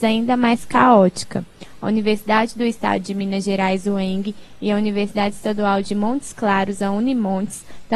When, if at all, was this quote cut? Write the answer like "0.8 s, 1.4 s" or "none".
none